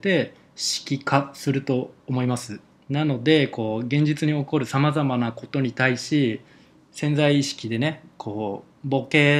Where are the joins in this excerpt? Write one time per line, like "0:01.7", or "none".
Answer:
0:02.7